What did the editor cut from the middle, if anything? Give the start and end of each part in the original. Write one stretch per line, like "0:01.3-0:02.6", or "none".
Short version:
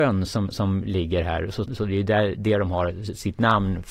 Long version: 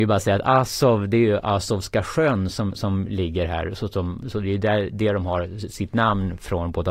0:03.9-0:04.2